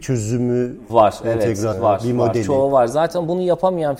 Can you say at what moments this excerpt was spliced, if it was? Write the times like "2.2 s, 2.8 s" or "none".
1.7 s